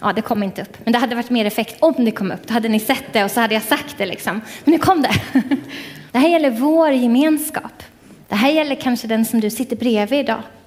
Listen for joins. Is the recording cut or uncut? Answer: cut